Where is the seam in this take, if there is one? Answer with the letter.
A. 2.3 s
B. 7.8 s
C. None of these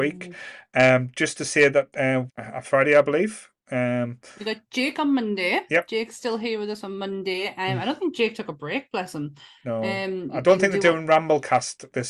A